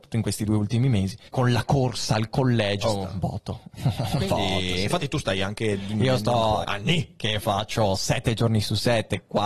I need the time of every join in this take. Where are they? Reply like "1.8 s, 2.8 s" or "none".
1.3 s, 2.8 s, 6.6 s

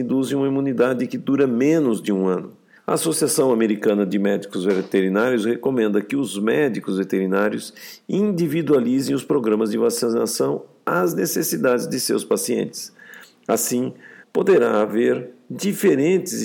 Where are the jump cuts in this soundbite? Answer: 2.8 s, 14.2 s

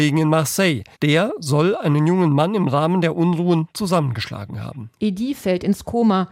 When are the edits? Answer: 0.9 s, 5.0 s

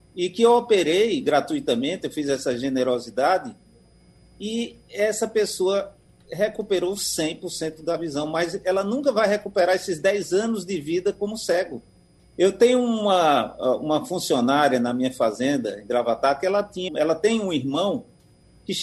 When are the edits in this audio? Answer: 12.2 s, 16.9 s

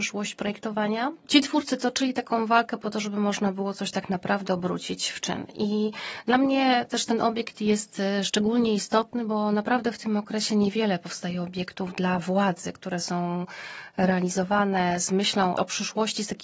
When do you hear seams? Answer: none

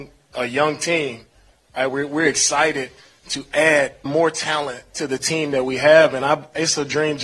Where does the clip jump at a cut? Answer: 1.9 s, 4.1 s

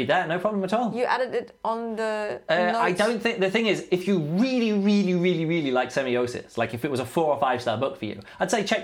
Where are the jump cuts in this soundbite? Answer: none

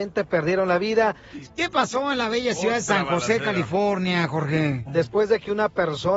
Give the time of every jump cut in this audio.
1.4 s, 4.9 s

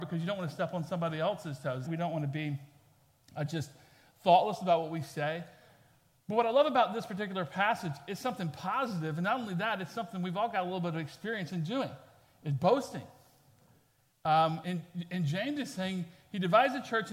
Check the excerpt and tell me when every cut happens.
1.8 s, 14.6 s

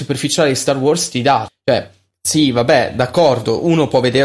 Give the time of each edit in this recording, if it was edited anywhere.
1.5 s

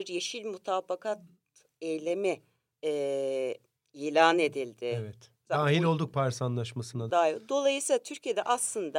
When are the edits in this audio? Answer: 7.1 s

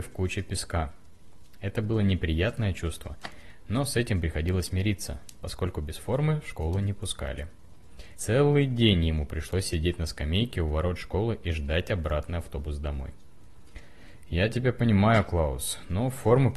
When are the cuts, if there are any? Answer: 8.1 s

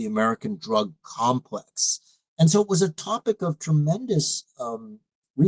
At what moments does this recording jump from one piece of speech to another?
2.3 s

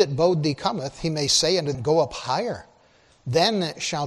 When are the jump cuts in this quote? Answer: 1.7 s

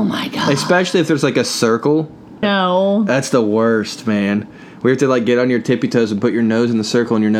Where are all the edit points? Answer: 2.4 s

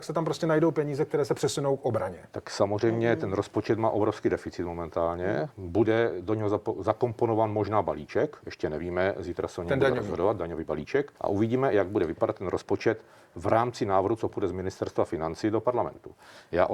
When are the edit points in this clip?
11.2 s

